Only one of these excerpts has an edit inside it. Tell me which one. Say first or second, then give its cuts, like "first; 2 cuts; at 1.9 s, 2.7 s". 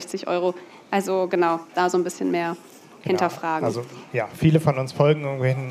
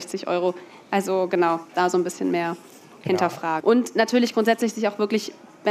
second; 1 cut; at 3.6 s